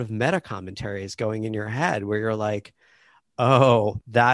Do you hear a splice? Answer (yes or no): no